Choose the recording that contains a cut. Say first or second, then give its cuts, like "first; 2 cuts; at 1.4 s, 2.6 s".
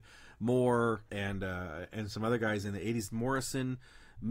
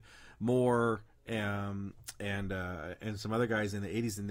first; 2 cuts; at 1.1 s, 3.1 s